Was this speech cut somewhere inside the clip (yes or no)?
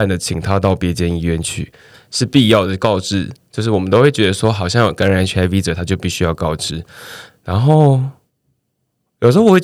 yes